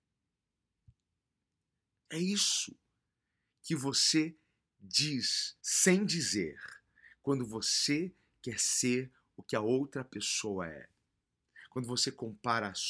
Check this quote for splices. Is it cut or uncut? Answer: cut